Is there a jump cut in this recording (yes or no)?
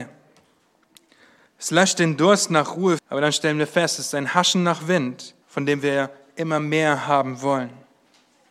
yes